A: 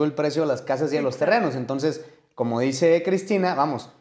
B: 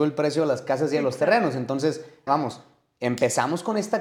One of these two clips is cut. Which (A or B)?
B